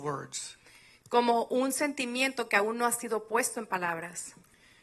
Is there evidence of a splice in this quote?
no; 0 cuts

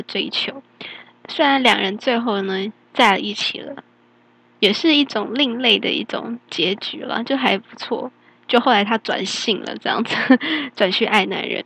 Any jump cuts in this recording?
no; 0 cuts

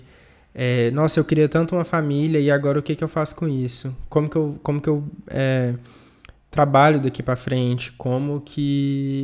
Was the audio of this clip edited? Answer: no; 0 cuts

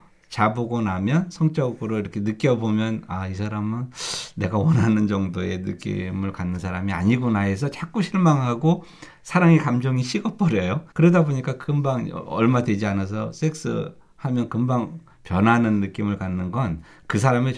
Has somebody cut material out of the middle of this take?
yes; 1 cut; at 10.9 s

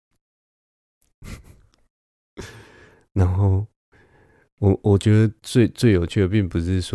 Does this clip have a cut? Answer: no; 0 cuts

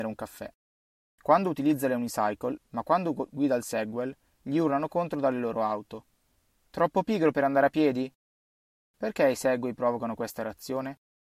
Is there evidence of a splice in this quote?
yes; 1 cut; at 2.6 s

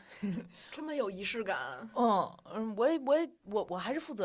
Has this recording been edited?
no; 0 cuts

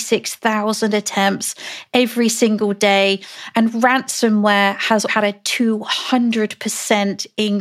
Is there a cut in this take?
yes; 1 cut; at 5.1 s

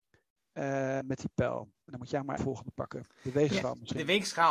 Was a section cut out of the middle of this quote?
yes; 2 cuts; at 1.0 s, 2.4 s

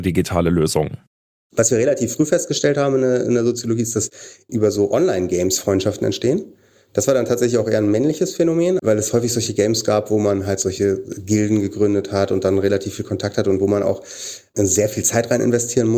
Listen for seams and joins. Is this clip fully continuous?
no; 1 cut; at 8.8 s

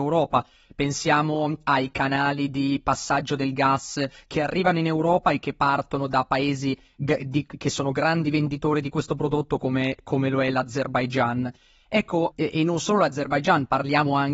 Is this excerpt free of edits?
no; 1 cut; at 12.3 s

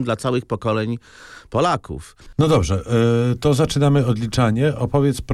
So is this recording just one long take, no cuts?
yes; 0 cuts

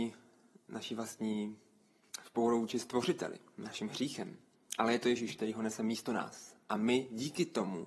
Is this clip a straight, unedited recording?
yes; 0 cuts

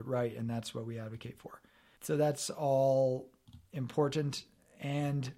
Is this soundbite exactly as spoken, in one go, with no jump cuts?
no; 1 cut; at 2.0 s

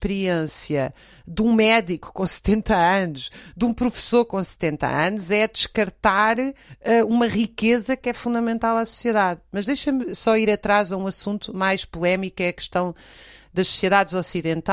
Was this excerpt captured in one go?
yes; 0 cuts

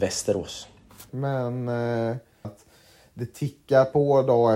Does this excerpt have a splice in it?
yes; 2 cuts; at 1.1 s, 2.4 s

